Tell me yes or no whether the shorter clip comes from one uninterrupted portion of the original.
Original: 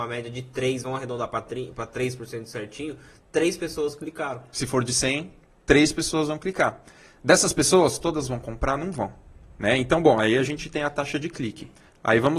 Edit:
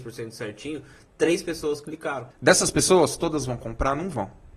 no